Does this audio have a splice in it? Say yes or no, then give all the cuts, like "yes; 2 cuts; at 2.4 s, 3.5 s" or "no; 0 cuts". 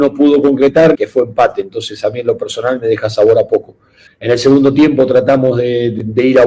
yes; 2 cuts; at 1.0 s, 4.1 s